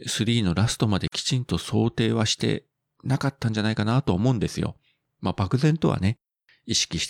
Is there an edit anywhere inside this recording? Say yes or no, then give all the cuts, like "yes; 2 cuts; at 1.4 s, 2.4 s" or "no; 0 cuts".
no; 0 cuts